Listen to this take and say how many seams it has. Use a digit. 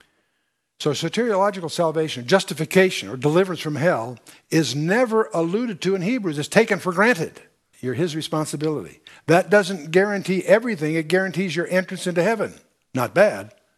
1